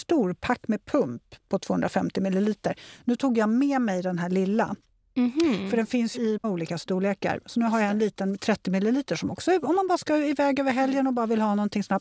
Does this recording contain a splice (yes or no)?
no